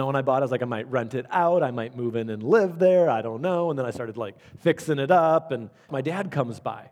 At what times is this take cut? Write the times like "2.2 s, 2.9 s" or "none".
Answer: 5.9 s